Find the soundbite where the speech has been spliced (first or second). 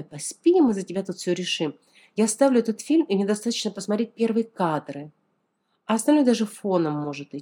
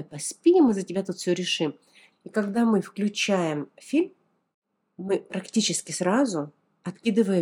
second